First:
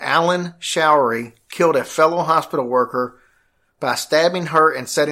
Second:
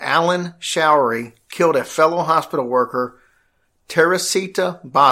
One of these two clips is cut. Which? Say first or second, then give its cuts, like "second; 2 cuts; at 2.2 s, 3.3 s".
first; 1 cut; at 3.7 s